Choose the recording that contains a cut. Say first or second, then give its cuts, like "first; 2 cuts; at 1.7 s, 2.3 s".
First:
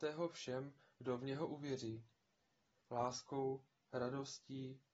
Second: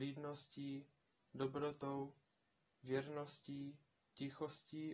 first; 1 cut; at 2.8 s